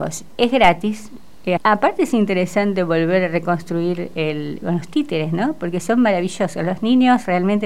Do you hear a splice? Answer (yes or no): yes